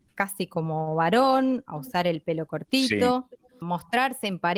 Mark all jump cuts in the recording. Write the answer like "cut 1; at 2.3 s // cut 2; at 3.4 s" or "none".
cut 1; at 3.6 s